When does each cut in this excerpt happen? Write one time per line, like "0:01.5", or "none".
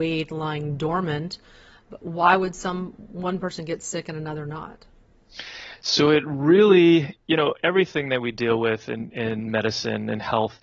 none